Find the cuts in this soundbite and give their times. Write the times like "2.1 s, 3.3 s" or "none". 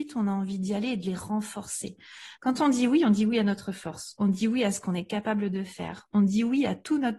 2.4 s, 4.2 s